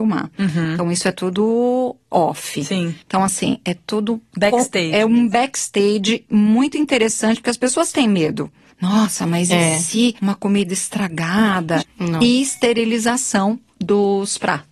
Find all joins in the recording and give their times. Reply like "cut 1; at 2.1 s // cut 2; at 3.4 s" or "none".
cut 1; at 11.8 s